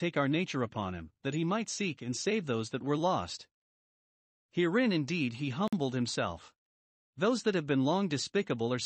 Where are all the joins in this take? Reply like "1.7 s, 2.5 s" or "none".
7.0 s